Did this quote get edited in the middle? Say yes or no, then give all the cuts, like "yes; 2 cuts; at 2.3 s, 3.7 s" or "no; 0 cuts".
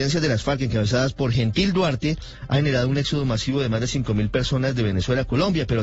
no; 0 cuts